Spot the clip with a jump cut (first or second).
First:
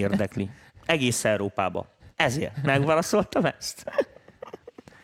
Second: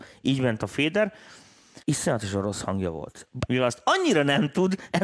second